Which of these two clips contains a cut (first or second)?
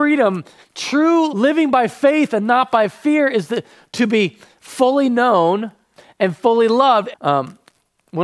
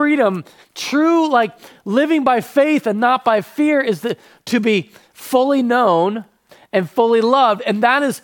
first